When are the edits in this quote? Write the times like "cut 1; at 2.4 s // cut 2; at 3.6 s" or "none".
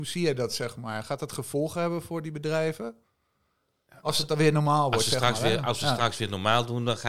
none